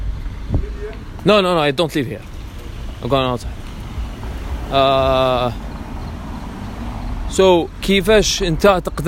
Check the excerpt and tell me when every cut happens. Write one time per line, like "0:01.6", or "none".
none